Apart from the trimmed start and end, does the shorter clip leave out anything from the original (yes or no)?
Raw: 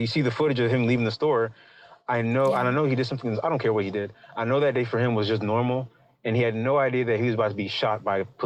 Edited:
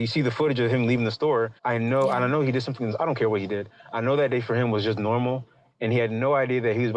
yes